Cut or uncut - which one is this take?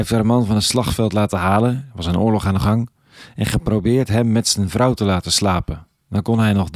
uncut